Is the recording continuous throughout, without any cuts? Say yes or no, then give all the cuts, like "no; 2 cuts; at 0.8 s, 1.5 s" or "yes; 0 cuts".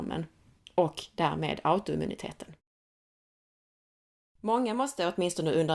yes; 0 cuts